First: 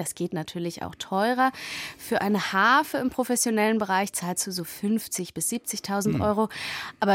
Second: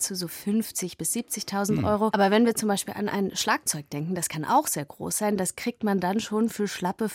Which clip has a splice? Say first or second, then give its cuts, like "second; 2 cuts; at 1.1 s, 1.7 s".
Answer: second; 1 cut; at 2.1 s